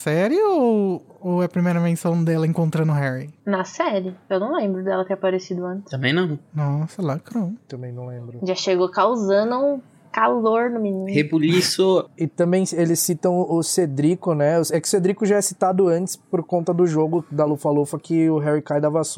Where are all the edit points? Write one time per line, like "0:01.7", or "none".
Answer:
none